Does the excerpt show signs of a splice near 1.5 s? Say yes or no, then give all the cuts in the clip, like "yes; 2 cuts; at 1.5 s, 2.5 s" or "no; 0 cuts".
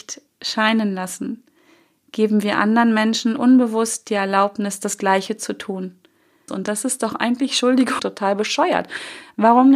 no; 2 cuts; at 6.5 s, 8.0 s